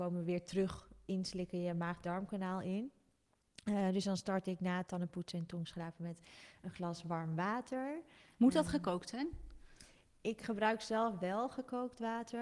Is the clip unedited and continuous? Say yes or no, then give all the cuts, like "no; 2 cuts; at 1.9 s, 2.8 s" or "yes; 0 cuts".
yes; 0 cuts